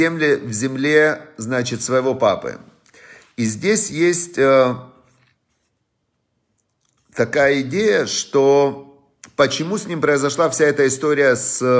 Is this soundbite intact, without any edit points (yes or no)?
yes